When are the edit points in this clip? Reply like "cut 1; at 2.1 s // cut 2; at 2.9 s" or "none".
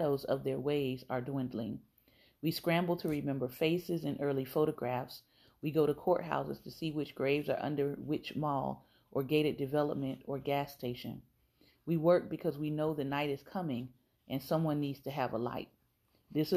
none